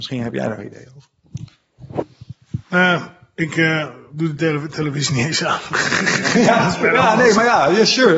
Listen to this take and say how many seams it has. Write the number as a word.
one